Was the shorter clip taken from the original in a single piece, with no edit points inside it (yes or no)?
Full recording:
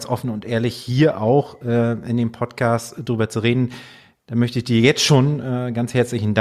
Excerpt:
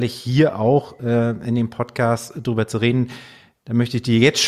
yes